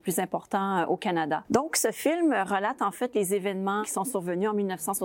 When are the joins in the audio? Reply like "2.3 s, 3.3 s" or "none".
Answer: 1.4 s